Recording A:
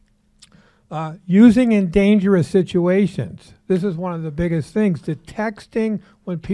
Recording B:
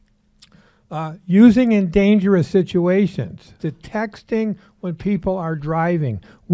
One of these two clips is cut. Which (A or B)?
B